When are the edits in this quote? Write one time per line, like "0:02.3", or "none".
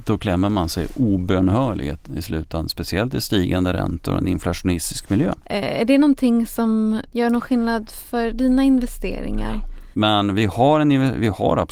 0:05.4
0:09.9